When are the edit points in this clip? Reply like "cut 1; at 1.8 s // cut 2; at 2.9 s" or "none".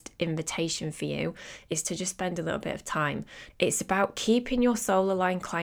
cut 1; at 3.5 s